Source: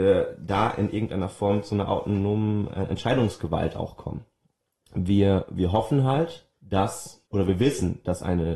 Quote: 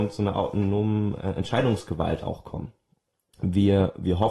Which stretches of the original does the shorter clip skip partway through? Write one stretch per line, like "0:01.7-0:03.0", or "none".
none